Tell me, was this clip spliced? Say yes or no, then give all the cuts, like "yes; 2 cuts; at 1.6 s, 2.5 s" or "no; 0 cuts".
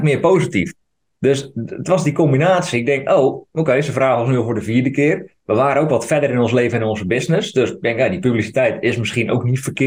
no; 0 cuts